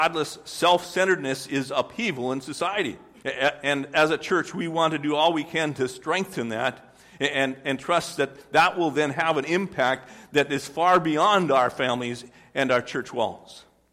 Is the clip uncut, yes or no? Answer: no